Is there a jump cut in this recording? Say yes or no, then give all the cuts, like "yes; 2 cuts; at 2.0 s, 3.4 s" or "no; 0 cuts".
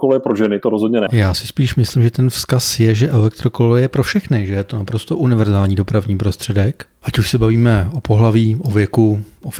yes; 1 cut; at 1.1 s